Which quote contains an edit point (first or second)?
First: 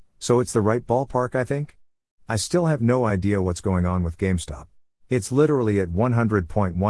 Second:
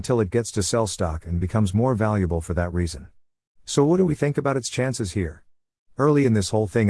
first